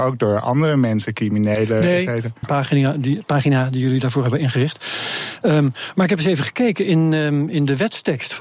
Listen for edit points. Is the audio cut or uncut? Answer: cut